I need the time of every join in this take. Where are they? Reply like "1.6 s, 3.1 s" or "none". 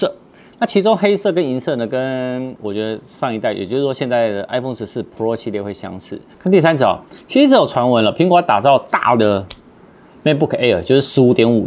6.3 s